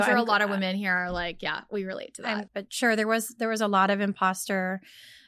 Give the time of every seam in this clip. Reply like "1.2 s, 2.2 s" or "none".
2.5 s

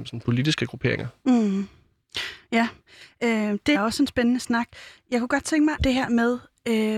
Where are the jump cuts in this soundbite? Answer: 3.7 s, 5.8 s

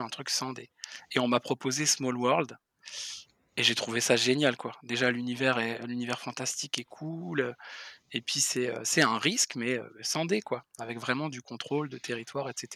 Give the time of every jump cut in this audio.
none

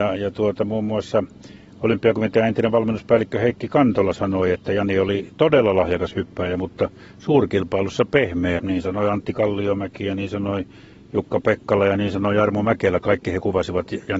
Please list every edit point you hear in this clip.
8.6 s

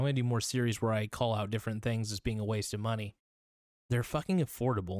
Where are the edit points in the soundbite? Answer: 3.7 s

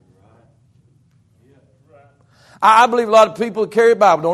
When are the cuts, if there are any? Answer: none

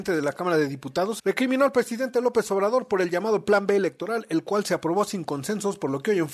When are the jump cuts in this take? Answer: 1.2 s

